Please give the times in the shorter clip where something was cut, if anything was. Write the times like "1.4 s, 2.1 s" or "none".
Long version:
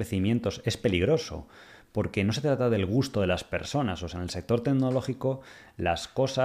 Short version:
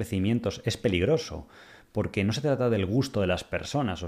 none